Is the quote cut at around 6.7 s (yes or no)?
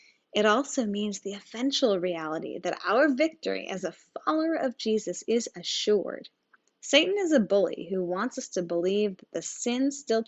no